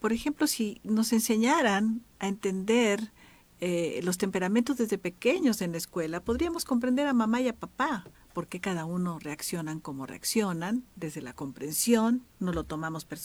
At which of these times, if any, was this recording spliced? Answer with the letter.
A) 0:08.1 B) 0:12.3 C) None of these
A